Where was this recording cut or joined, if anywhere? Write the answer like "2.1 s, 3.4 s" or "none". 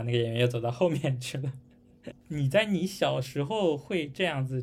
2.1 s